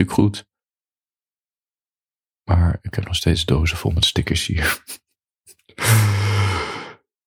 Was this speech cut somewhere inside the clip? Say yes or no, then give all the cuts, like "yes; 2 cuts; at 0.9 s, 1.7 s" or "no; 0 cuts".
no; 0 cuts